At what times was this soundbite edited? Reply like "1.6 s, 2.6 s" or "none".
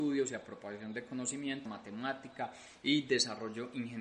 1.7 s